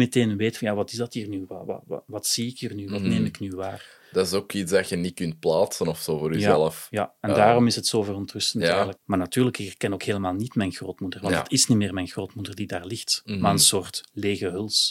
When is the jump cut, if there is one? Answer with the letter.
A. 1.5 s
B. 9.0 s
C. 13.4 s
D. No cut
B